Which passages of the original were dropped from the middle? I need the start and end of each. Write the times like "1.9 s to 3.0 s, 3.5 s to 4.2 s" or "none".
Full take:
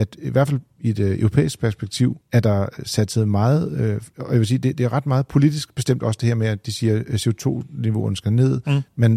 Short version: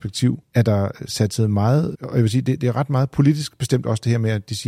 3.7 s to 4.1 s